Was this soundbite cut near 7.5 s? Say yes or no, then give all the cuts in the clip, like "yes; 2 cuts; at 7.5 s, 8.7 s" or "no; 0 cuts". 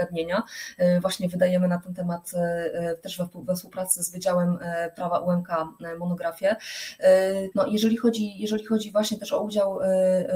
yes; 1 cut; at 7.5 s